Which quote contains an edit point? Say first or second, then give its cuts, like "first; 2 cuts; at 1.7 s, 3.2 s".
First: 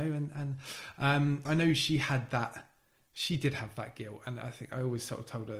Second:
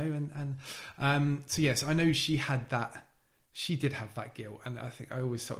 first; 1 cut; at 1.4 s